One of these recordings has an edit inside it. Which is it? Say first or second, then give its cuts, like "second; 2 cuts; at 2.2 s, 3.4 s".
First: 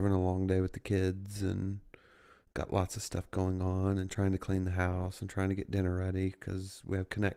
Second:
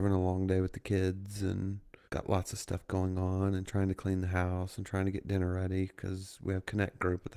second; 1 cut; at 2.0 s